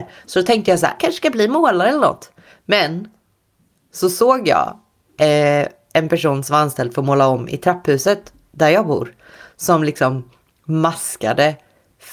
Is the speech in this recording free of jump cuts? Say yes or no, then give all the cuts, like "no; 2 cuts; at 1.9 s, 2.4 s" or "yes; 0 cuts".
no; 1 cut; at 1.0 s